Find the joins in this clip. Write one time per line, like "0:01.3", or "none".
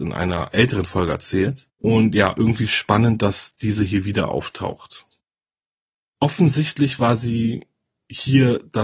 none

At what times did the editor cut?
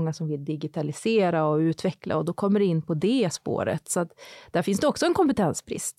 none

